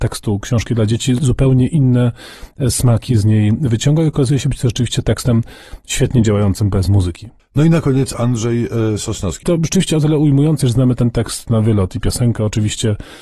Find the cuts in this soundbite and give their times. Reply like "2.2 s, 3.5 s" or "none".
9.4 s, 10.6 s